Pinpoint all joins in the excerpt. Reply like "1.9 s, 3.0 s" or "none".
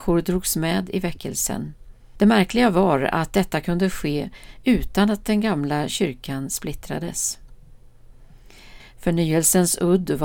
2.2 s, 8.8 s